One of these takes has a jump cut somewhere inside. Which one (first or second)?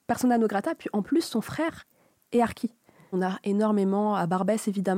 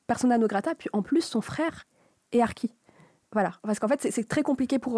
first